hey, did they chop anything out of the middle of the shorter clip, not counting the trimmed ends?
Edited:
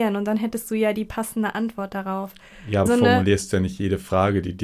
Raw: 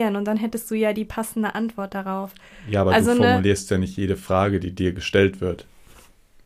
yes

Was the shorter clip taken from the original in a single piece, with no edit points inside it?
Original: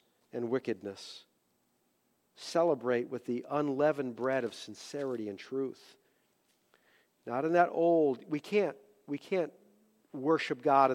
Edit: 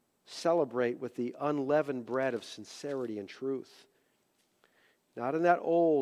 yes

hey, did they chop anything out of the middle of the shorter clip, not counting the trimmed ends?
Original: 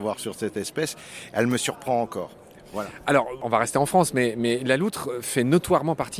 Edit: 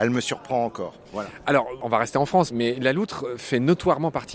yes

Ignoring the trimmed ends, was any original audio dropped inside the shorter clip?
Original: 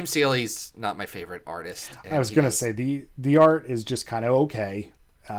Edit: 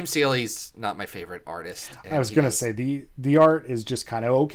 no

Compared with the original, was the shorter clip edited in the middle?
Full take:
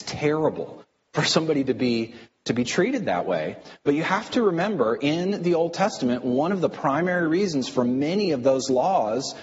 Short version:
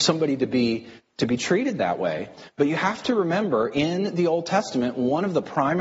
no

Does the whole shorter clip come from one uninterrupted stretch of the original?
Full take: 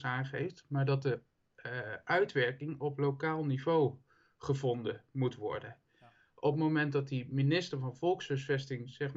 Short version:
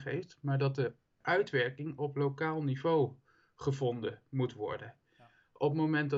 no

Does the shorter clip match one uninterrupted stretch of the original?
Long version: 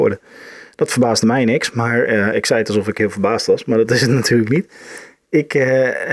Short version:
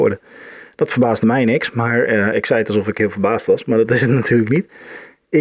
yes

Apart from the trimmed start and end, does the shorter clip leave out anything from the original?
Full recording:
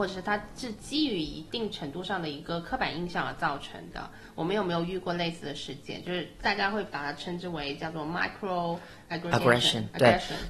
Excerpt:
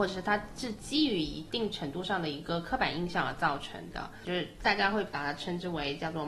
yes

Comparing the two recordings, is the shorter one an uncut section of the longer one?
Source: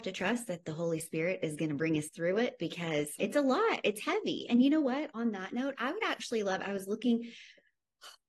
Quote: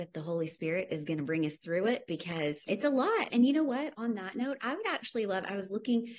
no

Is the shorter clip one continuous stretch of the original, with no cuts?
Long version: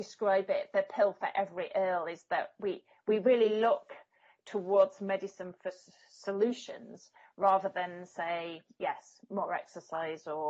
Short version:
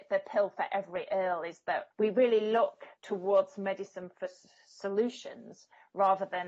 no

